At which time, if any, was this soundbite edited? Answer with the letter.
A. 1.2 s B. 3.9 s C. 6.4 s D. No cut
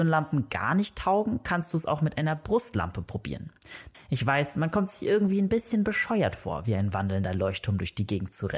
B